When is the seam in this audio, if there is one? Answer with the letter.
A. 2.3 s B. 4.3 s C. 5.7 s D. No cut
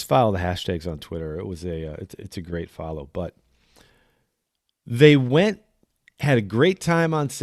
D